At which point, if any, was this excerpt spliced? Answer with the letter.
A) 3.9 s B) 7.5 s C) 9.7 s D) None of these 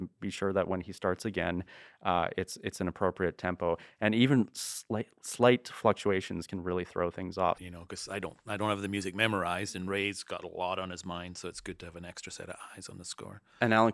B